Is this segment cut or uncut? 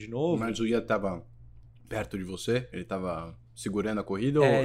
uncut